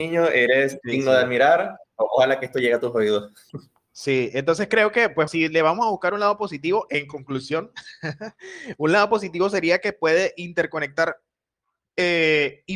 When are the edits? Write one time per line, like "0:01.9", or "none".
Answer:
0:05.3